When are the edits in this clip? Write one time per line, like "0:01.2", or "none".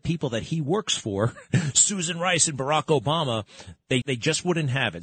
0:04.0